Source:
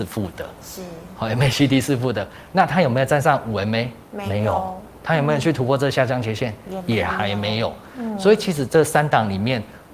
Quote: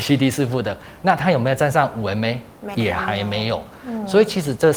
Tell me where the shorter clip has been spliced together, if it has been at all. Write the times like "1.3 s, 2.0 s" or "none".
2.7 s